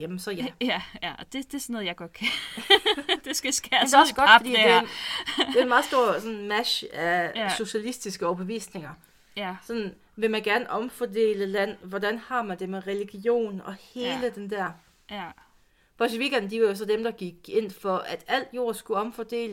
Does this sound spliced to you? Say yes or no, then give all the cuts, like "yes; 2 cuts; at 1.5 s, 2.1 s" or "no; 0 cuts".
no; 0 cuts